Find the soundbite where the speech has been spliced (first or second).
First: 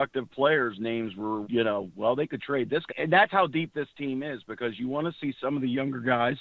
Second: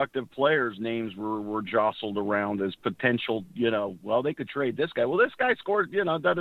first